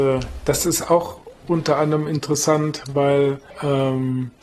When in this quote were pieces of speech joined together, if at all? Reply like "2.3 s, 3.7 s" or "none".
3.5 s